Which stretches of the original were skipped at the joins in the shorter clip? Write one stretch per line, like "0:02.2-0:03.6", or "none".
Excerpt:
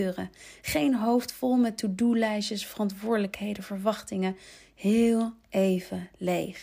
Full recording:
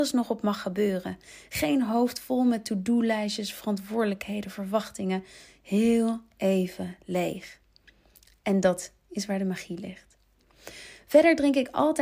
none

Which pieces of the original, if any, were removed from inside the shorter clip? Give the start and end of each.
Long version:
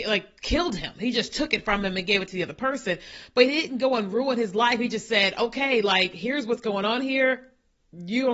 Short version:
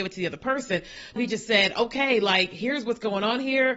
0:03.3-0:04.8

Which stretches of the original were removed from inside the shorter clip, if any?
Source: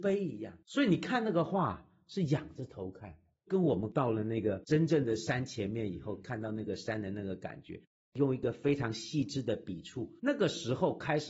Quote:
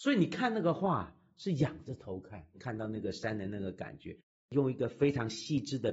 0:03.2-0:06.2

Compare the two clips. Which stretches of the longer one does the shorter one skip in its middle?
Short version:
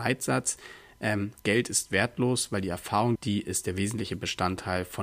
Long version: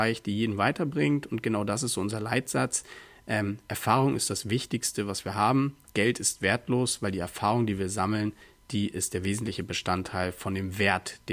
0:03.6-0:05.8
0:07.7-0:08.6

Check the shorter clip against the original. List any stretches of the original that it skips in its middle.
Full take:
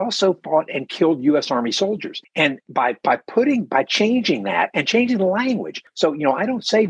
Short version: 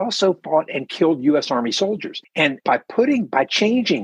0:02.6-0:03.0

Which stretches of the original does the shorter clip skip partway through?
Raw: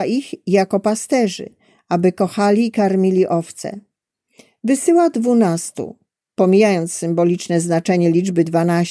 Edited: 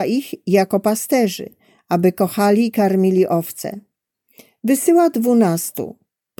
none

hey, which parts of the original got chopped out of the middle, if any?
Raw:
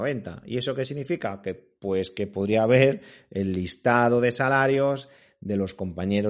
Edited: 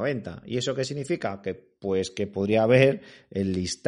none

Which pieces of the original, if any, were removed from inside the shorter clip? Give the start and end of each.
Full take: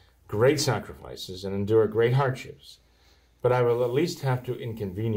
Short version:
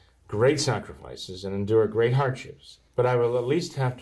0:02.9-0:03.3

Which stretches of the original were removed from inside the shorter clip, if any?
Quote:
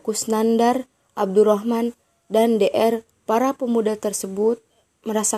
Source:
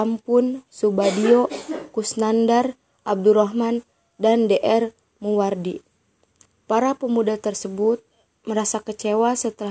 0:05.0-0:06.5

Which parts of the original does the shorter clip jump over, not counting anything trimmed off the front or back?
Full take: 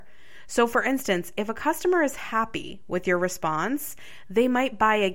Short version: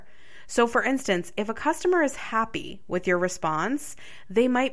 none

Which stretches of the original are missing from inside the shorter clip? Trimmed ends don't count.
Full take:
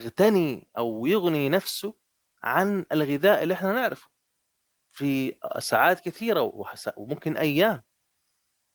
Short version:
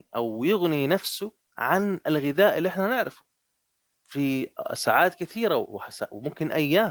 0:02.1-0:02.3

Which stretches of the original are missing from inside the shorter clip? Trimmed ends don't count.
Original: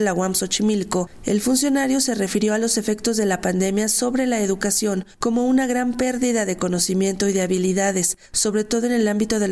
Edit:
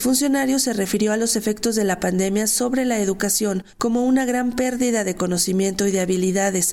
none

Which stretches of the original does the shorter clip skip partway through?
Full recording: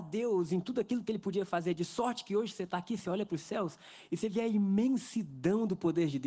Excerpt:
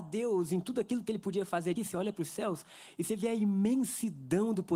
0:01.8-0:02.9

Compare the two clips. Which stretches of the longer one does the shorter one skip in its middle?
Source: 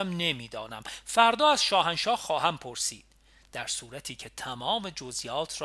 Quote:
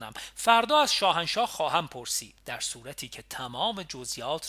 0:03.1-0:03.4

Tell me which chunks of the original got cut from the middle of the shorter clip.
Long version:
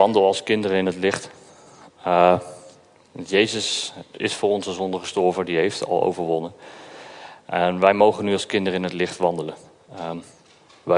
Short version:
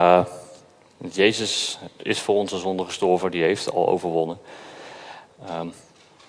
0:07.4-0:09.8

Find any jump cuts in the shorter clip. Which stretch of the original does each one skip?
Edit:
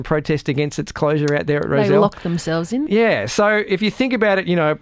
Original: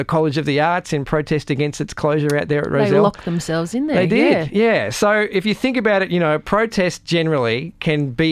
0:03.9-0:04.5

